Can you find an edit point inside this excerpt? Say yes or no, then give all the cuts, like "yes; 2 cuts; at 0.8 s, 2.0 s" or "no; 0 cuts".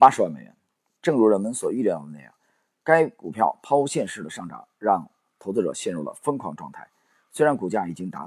yes; 1 cut; at 1.0 s